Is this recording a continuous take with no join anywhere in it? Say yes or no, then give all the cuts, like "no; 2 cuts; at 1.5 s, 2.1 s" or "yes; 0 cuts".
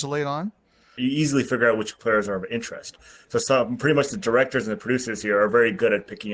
no; 1 cut; at 1.0 s